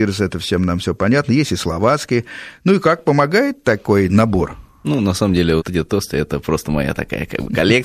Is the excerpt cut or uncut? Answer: cut